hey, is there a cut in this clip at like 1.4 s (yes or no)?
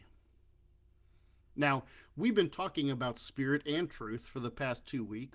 yes